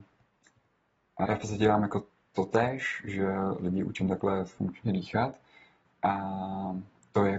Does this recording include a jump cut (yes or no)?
yes